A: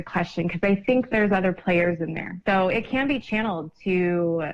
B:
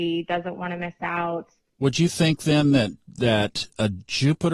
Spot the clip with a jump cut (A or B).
A